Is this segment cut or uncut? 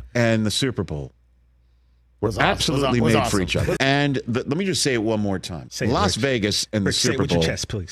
cut